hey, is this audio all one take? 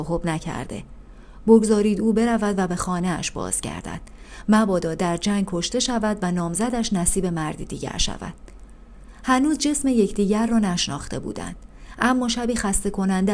yes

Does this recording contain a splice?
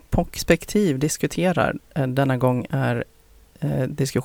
no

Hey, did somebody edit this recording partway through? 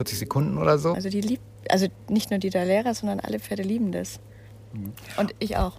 yes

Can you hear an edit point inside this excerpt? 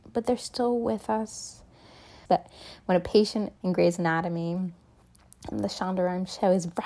yes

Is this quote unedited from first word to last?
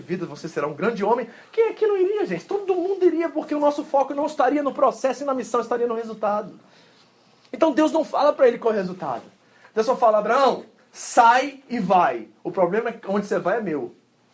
yes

